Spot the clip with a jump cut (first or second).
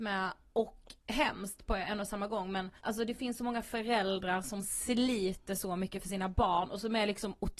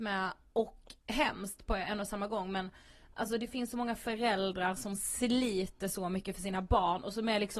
first